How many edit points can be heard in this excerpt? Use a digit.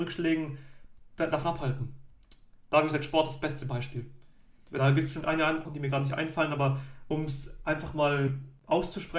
1